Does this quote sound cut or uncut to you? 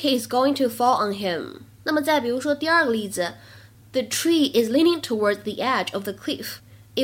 uncut